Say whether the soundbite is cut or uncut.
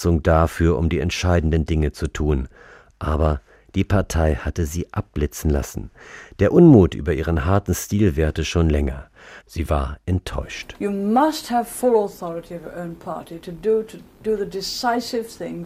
cut